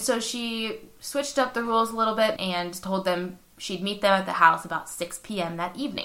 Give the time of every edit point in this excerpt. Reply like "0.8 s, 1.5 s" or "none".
2.4 s